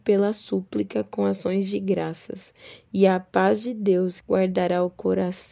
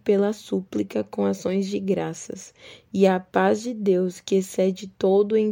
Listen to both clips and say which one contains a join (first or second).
first